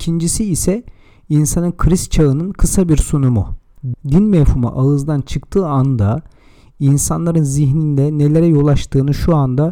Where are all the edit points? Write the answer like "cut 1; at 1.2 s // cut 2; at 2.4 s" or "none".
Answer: cut 1; at 3.9 s